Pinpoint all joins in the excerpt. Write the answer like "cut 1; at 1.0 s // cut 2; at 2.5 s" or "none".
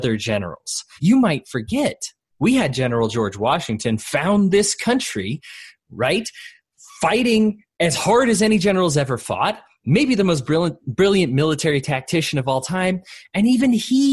cut 1; at 1.0 s